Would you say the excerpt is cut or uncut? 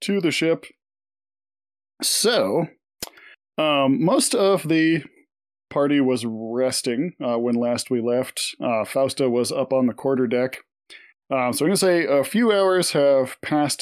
uncut